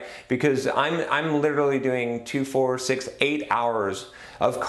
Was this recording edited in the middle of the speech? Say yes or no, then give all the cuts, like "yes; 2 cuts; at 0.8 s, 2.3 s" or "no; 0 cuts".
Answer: no; 0 cuts